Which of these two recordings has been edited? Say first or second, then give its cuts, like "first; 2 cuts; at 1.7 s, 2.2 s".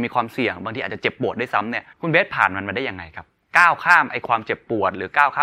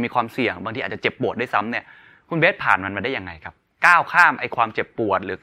first; 1 cut; at 1.9 s